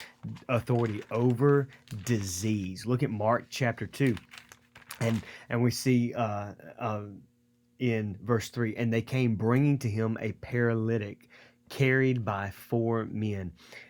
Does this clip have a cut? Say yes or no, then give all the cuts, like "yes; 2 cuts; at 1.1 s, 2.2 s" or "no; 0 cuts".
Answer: no; 0 cuts